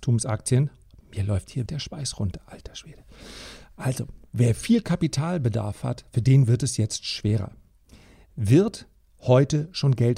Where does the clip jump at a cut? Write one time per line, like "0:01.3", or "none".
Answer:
0:01.7